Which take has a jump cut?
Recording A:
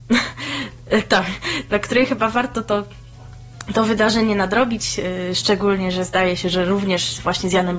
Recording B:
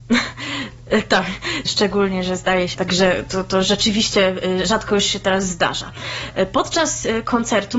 B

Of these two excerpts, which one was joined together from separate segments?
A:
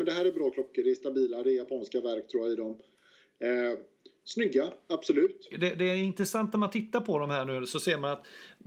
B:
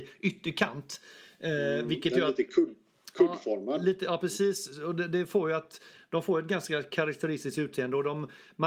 A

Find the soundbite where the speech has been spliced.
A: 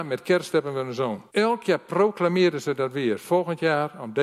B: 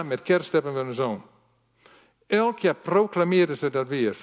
A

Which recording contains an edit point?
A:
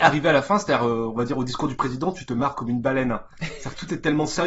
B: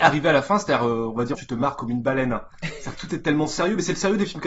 B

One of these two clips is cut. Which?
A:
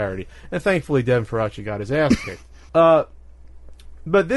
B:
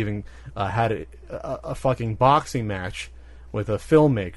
A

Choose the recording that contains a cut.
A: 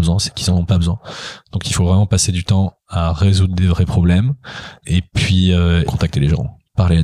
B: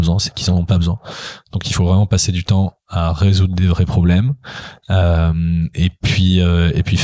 A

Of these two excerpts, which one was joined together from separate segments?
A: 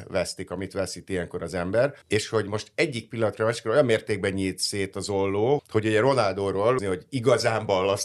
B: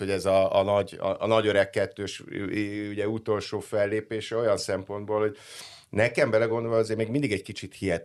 A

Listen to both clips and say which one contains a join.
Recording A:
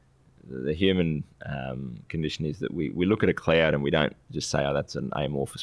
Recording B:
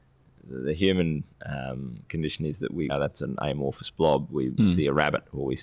B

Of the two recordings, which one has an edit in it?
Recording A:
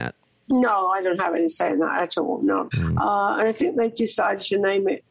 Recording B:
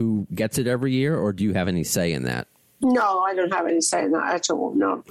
A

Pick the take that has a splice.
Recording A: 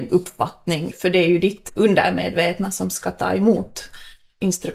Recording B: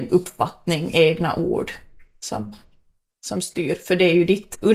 A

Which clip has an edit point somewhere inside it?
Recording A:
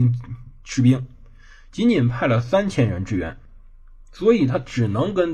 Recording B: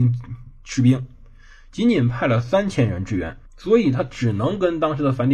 B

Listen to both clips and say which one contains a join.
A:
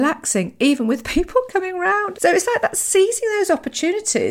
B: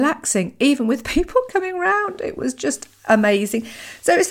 A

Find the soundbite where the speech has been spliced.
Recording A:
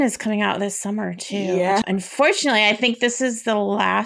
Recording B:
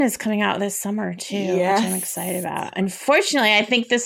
A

